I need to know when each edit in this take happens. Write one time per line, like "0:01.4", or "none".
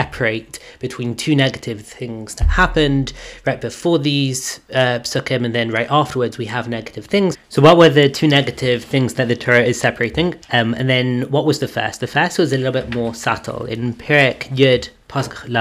0:07.3
0:10.4